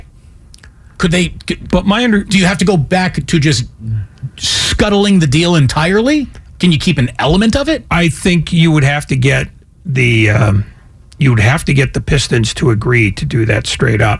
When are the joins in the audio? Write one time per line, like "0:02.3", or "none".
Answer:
none